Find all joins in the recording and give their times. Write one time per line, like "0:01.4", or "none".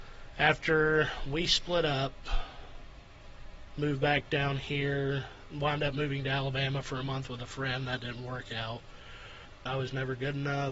0:09.7